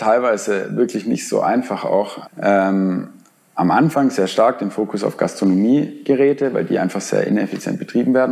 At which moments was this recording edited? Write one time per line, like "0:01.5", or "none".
0:02.2